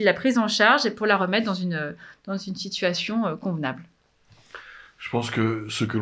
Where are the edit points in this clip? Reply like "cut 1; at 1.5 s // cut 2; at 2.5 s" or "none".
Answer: none